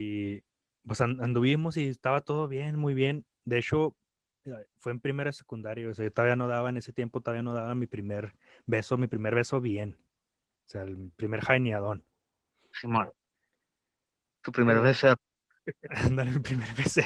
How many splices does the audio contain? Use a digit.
0